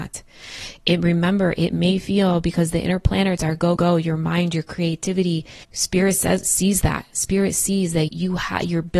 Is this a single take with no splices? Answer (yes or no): no